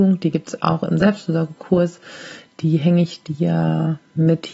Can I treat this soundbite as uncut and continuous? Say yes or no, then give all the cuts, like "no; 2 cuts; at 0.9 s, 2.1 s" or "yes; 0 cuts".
yes; 0 cuts